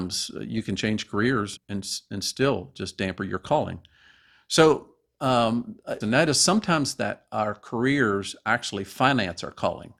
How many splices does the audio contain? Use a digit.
2